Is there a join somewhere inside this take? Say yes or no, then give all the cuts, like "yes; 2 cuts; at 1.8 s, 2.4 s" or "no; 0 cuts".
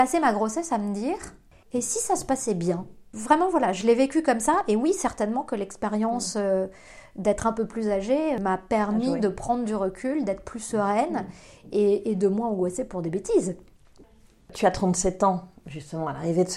no; 0 cuts